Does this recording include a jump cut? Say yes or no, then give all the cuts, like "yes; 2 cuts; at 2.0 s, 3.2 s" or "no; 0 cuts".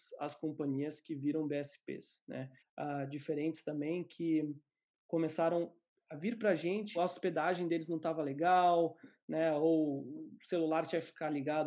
yes; 2 cuts; at 2.6 s, 6.9 s